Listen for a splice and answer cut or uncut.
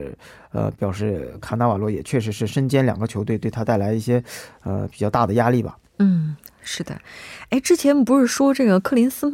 uncut